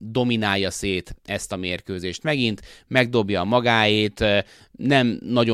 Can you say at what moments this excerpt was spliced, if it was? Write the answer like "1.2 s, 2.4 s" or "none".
none